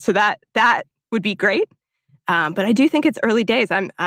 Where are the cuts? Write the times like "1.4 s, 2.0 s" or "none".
none